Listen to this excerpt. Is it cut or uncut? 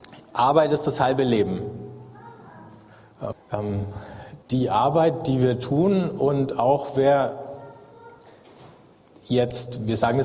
cut